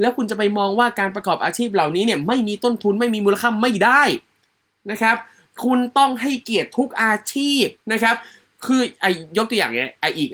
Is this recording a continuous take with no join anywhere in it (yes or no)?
no